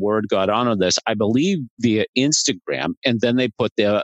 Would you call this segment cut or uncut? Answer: uncut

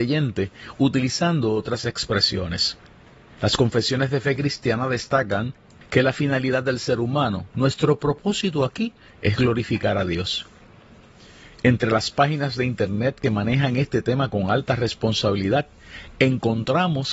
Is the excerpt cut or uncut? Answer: uncut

